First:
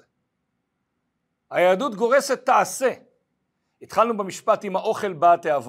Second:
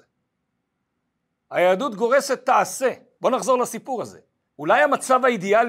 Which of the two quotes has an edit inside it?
second; 2 cuts; at 3.2 s, 4.5 s

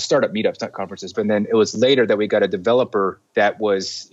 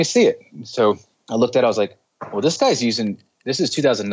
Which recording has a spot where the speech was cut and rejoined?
first; 1 cut; at 1.1 s

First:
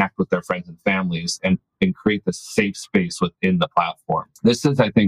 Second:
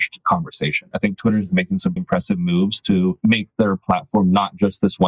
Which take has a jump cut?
second; 2 cuts; at 0.9 s, 2.0 s

